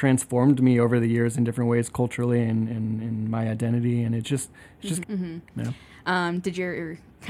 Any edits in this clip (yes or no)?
yes